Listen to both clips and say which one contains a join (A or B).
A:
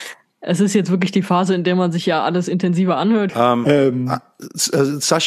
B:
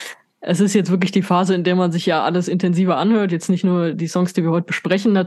A